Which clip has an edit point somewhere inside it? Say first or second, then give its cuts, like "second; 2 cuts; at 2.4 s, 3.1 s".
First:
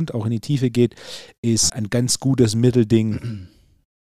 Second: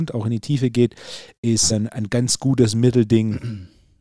first; 1 cut; at 1.7 s